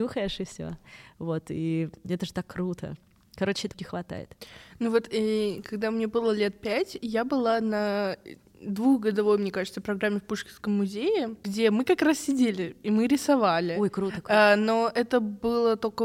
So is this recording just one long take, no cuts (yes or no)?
no